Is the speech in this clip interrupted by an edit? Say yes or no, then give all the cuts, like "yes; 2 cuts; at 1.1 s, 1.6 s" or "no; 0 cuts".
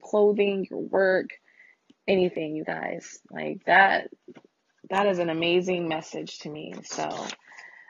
no; 0 cuts